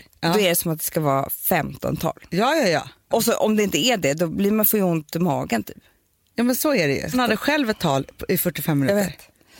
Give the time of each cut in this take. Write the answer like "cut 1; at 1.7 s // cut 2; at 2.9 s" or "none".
cut 1; at 3.1 s // cut 2; at 7.1 s